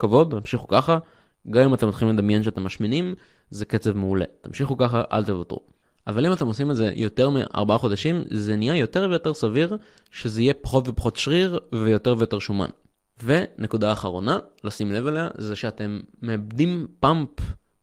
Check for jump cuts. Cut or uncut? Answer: uncut